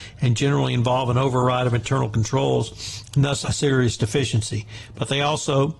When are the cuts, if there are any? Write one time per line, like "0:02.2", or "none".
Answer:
0:03.4